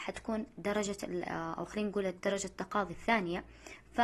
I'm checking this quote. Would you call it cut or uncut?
cut